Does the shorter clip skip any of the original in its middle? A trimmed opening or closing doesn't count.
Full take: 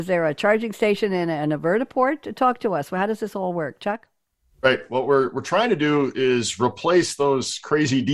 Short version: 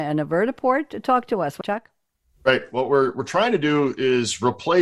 yes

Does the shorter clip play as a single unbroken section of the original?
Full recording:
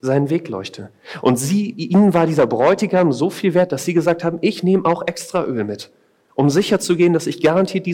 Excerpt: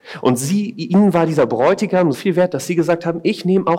no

